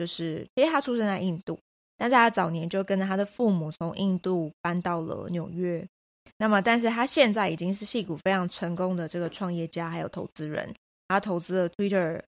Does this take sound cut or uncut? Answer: uncut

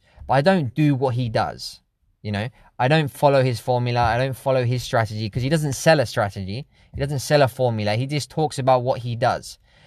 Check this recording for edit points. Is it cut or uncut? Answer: uncut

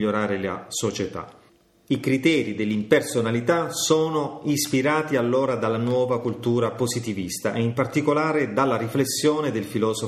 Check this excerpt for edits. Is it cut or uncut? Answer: uncut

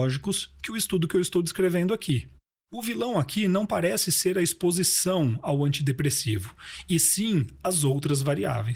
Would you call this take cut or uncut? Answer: cut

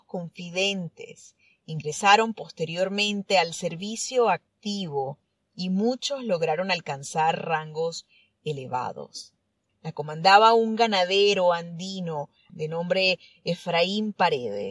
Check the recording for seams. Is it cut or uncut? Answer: cut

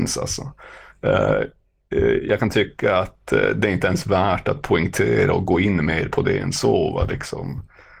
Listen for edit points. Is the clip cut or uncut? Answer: uncut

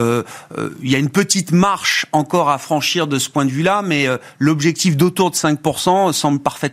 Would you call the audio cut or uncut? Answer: uncut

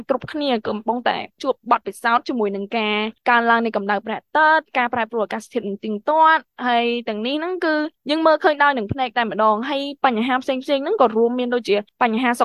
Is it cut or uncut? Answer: uncut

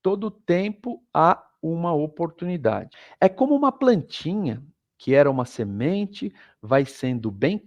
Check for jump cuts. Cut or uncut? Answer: uncut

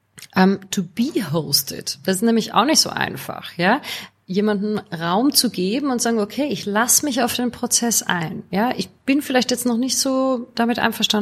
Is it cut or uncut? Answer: uncut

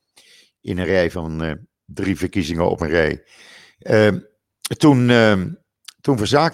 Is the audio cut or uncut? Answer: uncut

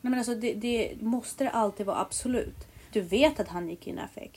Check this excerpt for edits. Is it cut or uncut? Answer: cut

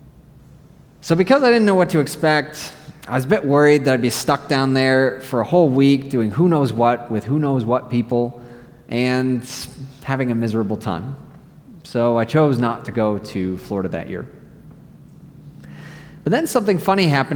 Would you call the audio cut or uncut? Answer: uncut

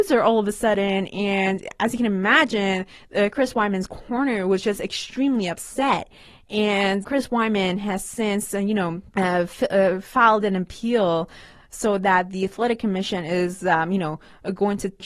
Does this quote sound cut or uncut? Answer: cut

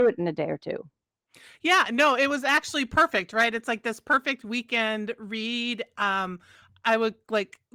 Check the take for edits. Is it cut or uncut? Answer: uncut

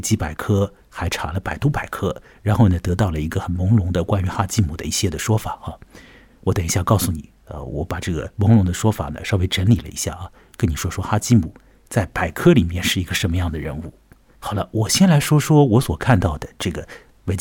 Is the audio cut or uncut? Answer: cut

